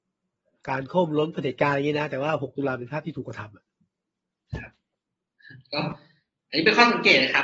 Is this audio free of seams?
yes; 0 cuts

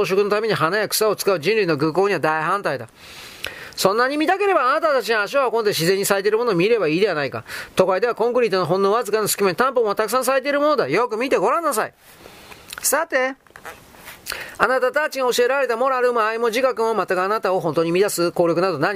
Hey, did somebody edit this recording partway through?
no; 0 cuts

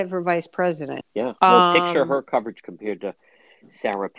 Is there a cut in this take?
yes; 1 cut; at 1.0 s

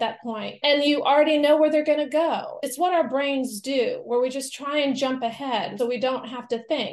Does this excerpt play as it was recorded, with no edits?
no; 1 cut; at 5.8 s

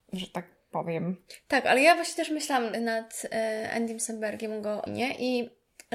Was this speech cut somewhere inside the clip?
yes; 2 cuts; at 2.7 s, 4.9 s

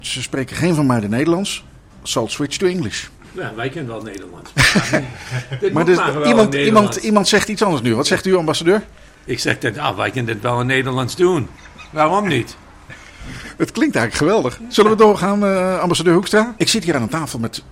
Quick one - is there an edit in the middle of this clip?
yes; 1 cut; at 16.6 s

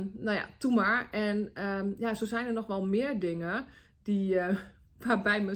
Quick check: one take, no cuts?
yes; 0 cuts

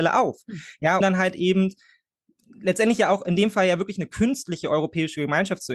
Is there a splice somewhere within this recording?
yes; 1 cut; at 1.0 s

